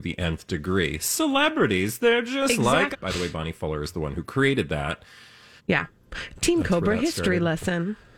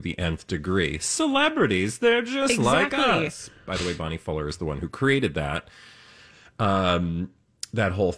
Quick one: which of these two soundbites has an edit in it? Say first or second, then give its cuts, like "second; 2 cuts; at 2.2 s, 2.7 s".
first; 2 cuts; at 2.9 s, 5.6 s